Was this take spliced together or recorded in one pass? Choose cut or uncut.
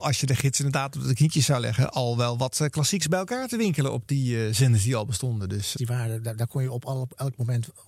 cut